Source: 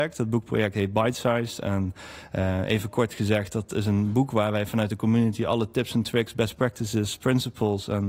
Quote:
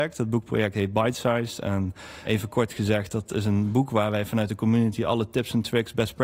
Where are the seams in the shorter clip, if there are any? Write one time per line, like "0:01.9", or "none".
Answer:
0:02.2